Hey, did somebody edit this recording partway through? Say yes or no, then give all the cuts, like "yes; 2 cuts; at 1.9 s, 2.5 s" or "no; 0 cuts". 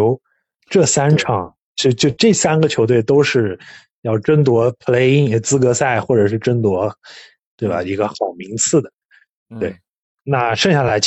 no; 0 cuts